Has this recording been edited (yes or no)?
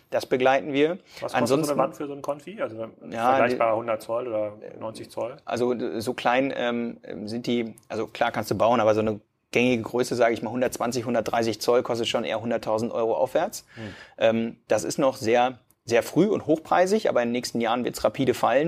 no